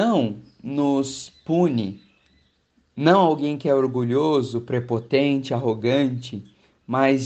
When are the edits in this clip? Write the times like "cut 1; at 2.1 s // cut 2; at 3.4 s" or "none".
none